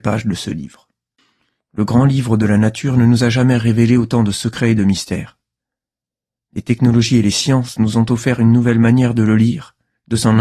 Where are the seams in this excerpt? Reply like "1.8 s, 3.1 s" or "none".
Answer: 1.6 s